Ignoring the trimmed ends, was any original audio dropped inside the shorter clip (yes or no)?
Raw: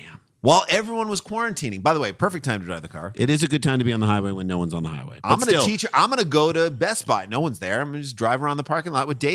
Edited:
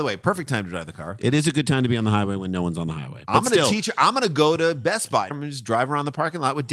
yes